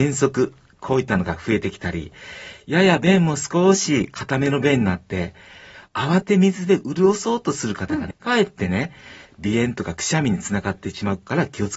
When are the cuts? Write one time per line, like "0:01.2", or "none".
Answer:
0:06.2
0:08.1
0:09.3